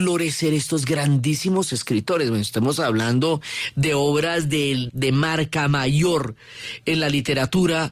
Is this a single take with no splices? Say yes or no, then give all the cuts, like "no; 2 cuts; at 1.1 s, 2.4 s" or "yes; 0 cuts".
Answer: no; 1 cut; at 4.9 s